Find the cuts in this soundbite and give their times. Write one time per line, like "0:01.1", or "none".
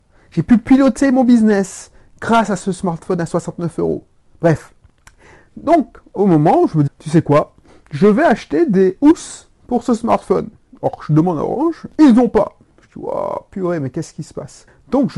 0:06.9